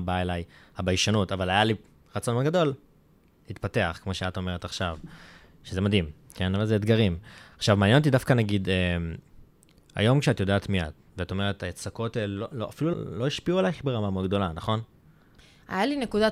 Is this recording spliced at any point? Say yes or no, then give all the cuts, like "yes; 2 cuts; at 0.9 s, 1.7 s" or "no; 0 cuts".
yes; 1 cut; at 12.9 s